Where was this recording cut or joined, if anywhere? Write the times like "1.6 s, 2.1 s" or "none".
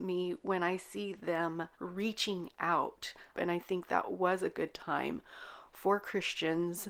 1.7 s, 3.3 s